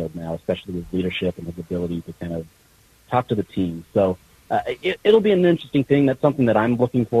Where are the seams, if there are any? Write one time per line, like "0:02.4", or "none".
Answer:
none